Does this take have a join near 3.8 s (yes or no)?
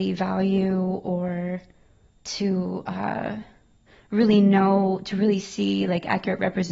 no